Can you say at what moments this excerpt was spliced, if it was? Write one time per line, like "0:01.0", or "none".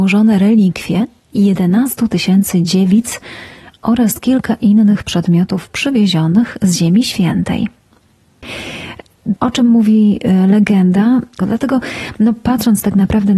0:09.4
0:11.4